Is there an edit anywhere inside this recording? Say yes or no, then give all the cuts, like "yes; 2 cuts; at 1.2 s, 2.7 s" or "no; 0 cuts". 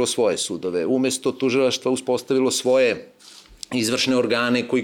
no; 0 cuts